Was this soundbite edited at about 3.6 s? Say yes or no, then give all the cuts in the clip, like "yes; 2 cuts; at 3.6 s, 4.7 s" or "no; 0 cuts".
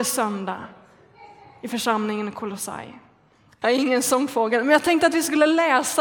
yes; 1 cut; at 3.6 s